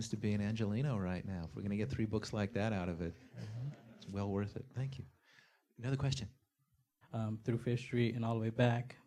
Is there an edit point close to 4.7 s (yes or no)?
no